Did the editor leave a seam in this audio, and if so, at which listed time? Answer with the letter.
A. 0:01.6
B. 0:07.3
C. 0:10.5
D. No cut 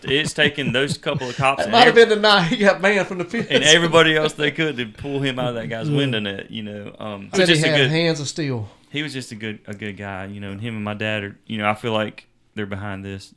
B